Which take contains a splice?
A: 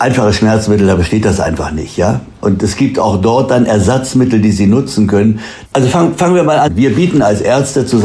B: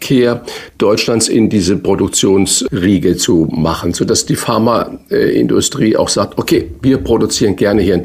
A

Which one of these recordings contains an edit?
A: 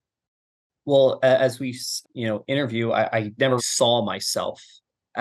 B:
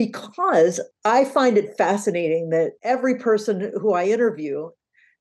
A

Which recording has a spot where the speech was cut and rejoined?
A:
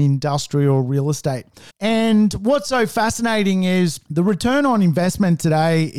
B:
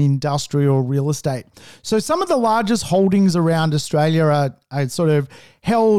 A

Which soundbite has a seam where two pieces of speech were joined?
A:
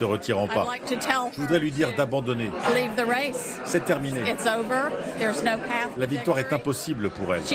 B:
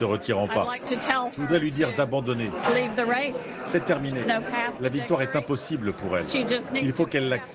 B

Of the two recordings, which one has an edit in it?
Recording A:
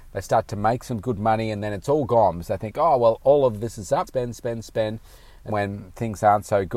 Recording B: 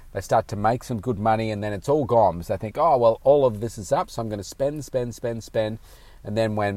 A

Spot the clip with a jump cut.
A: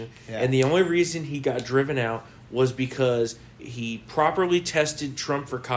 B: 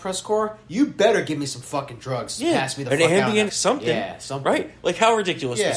B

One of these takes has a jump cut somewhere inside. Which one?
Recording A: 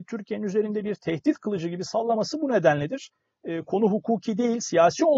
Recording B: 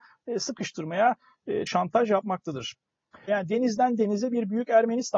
B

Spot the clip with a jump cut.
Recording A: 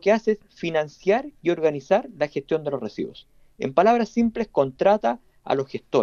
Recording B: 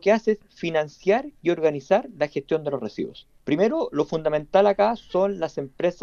B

